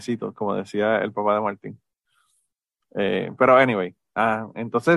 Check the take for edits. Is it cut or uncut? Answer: uncut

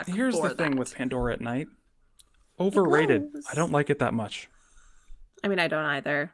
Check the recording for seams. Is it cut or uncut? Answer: uncut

